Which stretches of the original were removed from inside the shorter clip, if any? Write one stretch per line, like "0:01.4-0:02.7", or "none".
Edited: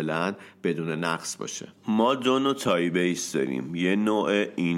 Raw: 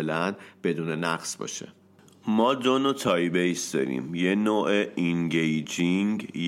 0:01.8-0:02.2